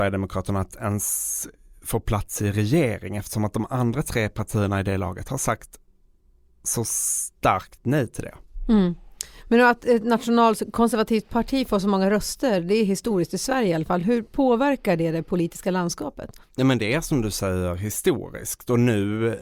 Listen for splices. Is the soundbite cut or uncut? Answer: uncut